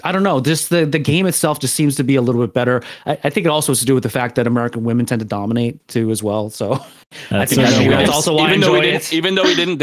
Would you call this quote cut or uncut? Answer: uncut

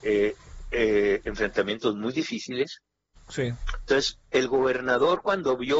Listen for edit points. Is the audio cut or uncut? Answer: cut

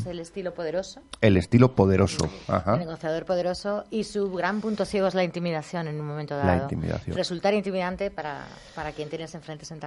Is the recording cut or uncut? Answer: uncut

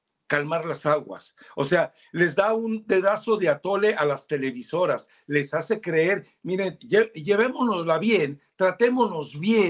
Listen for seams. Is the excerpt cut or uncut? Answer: uncut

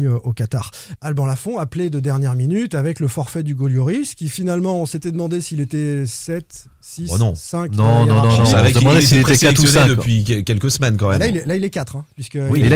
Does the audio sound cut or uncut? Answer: cut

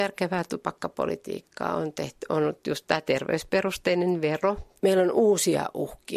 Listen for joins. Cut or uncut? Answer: cut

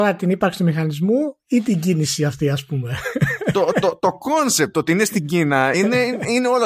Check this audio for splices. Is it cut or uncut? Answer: uncut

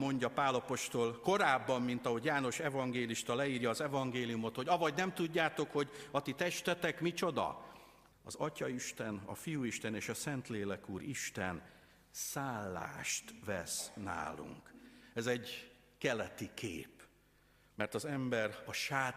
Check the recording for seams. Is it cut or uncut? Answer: cut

